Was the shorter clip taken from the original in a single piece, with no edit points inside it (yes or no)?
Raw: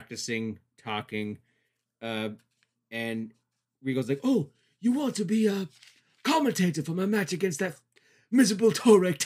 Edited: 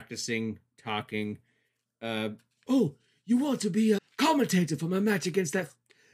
no